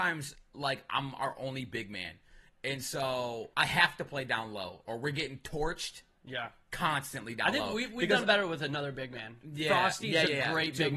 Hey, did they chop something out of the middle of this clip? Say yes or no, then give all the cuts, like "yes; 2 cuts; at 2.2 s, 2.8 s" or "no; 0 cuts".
yes; 1 cut; at 3.5 s